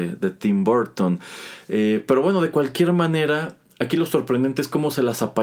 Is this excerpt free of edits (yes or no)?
yes